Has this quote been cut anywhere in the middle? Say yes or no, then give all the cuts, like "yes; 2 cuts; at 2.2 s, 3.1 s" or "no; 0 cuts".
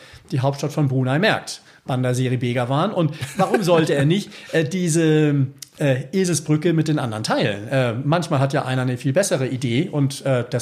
no; 0 cuts